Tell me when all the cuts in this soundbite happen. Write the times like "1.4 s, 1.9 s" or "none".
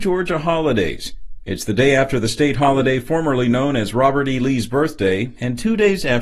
none